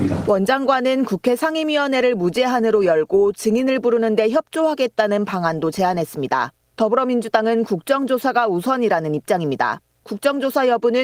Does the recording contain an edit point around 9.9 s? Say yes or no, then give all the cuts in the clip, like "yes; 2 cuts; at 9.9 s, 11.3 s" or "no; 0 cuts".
no; 0 cuts